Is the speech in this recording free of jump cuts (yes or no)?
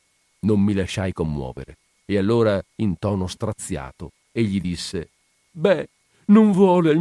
yes